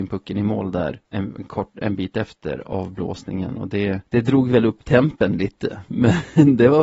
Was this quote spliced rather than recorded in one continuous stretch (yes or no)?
yes